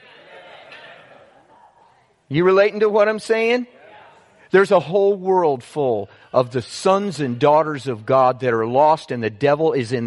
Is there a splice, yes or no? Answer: no